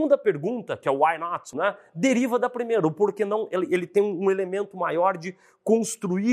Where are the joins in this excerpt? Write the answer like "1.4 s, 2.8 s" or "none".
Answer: 1.5 s